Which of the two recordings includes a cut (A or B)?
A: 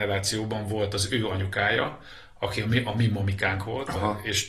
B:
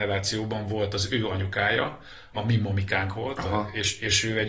B